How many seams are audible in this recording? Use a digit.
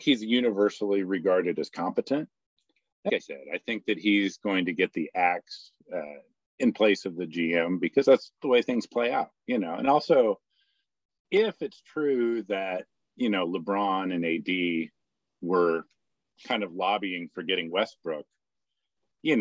1